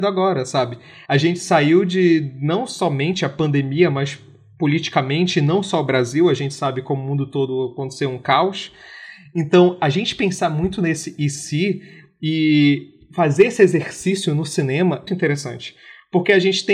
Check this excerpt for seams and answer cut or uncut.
cut